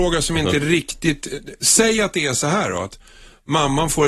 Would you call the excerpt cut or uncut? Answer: uncut